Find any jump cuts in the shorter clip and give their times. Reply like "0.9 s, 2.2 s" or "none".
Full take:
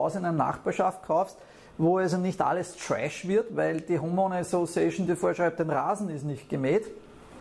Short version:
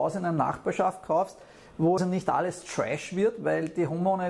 2.0 s